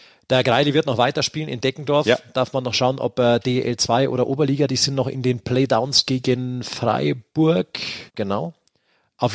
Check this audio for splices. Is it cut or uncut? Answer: cut